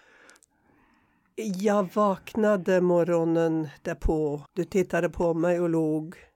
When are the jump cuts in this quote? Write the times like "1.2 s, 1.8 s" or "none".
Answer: 4.5 s